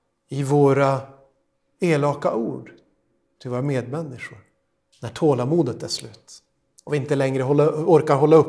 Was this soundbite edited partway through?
no; 0 cuts

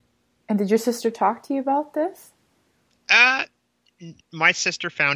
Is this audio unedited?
no; 1 cut; at 4.2 s

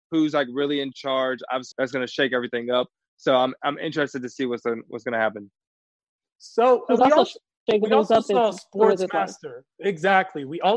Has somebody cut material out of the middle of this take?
yes; 1 cut; at 1.7 s

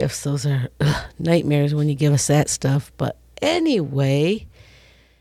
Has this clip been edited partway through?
no; 0 cuts

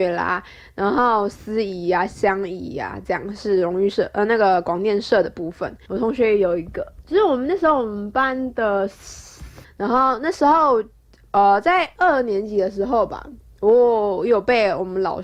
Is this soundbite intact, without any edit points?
no; 2 cuts; at 5.9 s, 9.6 s

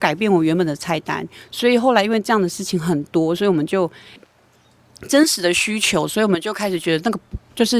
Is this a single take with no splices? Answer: no; 1 cut; at 4.2 s

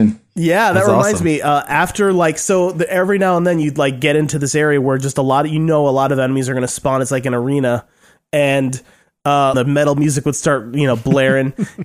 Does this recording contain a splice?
yes; 1 cut; at 9.5 s

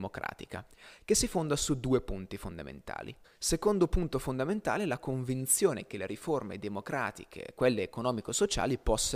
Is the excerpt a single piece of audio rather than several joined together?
no; 2 cuts; at 3.2 s, 7.5 s

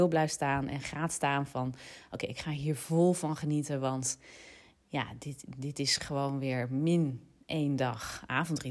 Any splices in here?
no; 0 cuts

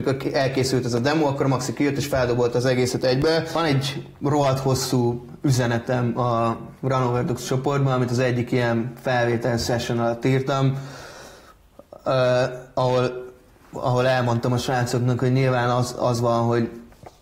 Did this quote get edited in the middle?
no; 0 cuts

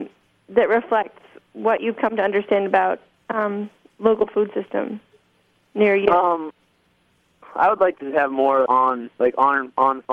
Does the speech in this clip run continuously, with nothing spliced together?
no; 2 cuts; at 7.4 s, 8.7 s

